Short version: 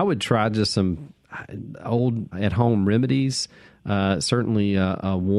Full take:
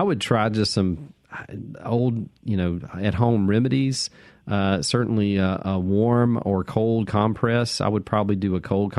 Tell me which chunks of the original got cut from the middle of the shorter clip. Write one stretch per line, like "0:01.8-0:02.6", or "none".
0:02.3-0:02.9